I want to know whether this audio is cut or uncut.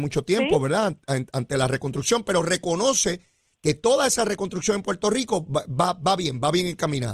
uncut